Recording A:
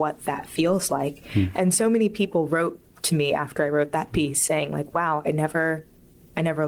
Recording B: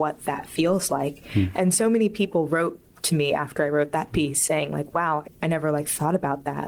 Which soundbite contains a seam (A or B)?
B